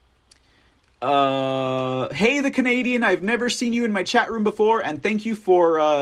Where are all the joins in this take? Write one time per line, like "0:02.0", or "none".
none